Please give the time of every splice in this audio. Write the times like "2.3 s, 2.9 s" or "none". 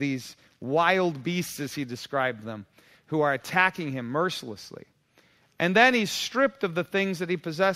none